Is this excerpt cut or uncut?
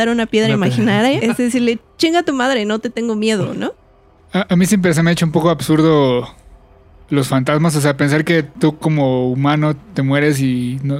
cut